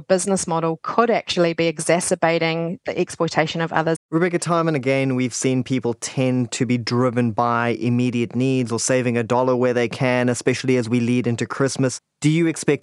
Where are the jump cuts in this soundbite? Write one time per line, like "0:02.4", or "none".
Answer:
0:04.0